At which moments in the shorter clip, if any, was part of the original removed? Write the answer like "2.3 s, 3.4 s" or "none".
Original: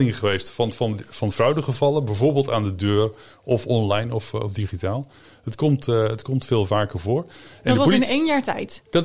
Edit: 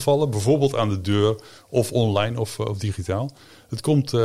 none